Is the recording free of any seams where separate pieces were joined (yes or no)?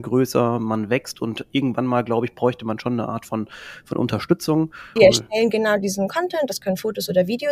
no